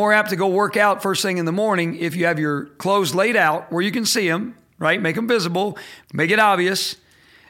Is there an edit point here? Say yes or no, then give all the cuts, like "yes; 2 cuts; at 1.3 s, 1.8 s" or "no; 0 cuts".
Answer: yes; 1 cut; at 6.0 s